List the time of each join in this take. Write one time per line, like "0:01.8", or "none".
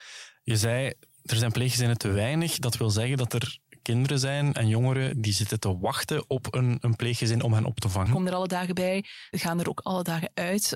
0:05.1
0:08.1
0:09.3